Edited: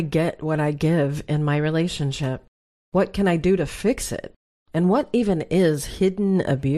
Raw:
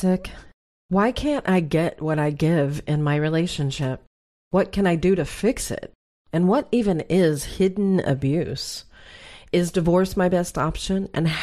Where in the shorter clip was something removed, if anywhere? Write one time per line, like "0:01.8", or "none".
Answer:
none